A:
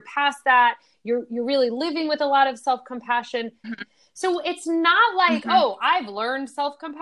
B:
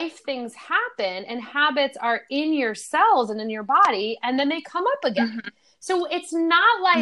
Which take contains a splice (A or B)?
A